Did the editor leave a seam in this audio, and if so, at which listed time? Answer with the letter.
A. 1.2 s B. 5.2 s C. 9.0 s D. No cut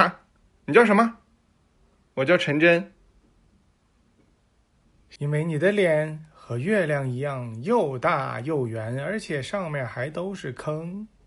B